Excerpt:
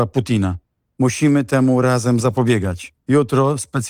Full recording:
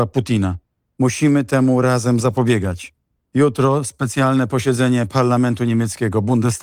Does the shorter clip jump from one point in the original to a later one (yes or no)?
yes